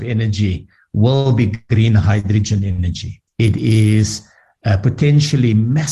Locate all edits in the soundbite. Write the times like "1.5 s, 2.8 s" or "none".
3.3 s